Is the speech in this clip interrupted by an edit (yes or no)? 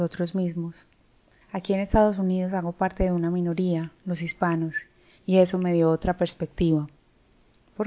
yes